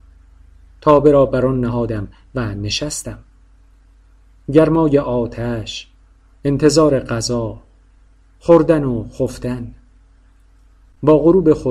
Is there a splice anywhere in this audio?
no; 0 cuts

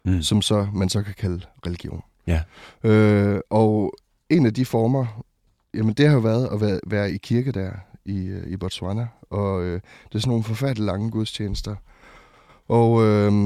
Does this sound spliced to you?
no; 0 cuts

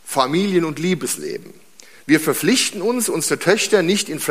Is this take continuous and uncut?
yes; 0 cuts

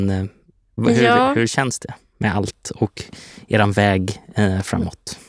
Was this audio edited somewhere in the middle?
no; 0 cuts

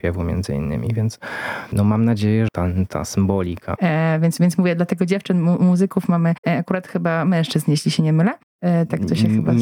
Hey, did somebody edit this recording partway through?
yes; 2 cuts; at 2.5 s, 3.8 s

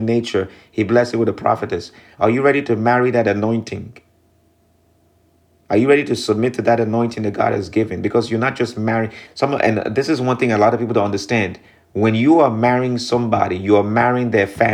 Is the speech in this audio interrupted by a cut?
no; 0 cuts

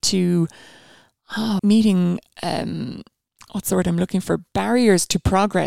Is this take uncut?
no; 1 cut; at 1.6 s

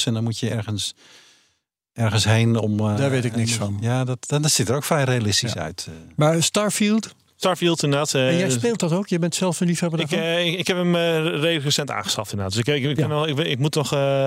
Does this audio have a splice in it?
no; 0 cuts

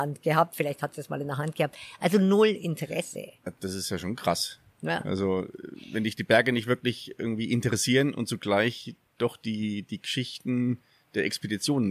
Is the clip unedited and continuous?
yes; 0 cuts

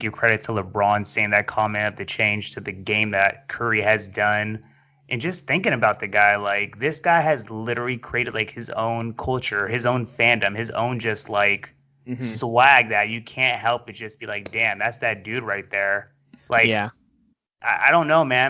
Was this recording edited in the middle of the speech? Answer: no; 0 cuts

